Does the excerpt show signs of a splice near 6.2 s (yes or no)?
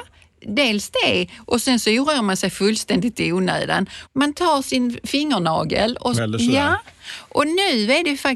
yes